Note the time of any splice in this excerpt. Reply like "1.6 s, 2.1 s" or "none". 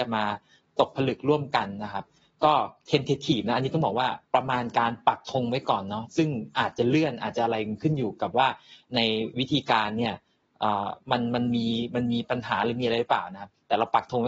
2.8 s, 4.2 s, 11.0 s

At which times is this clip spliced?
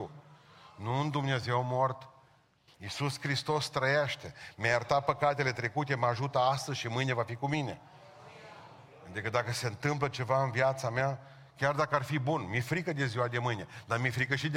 none

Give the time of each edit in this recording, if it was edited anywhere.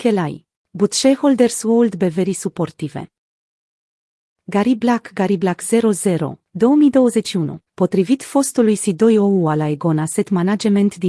6.4 s, 7.7 s

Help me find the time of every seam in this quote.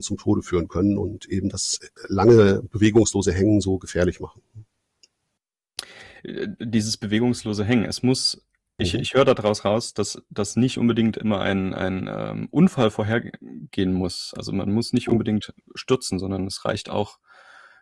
none

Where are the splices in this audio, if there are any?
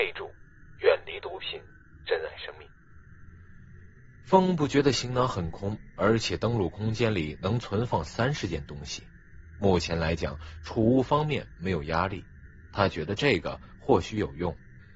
none

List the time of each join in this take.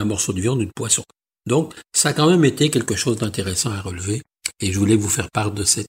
none

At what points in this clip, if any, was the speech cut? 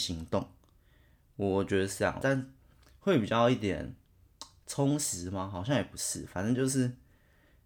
2.2 s

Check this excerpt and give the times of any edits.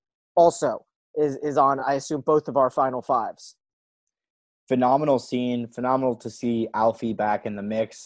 none

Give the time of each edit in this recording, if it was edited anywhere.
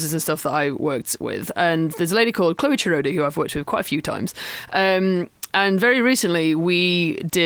none

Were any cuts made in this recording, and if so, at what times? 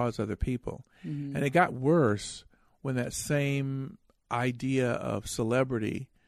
none

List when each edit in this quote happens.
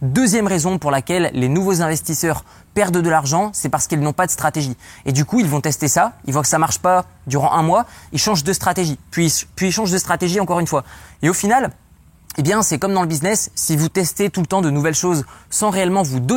none

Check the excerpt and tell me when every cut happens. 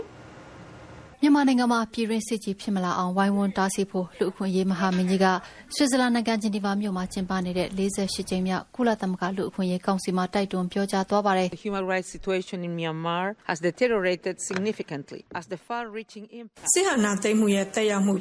1.1 s, 13.4 s, 15.3 s

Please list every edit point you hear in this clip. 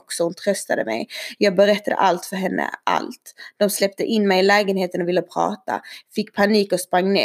none

